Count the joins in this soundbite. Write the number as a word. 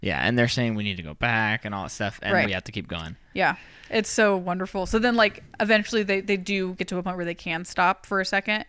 two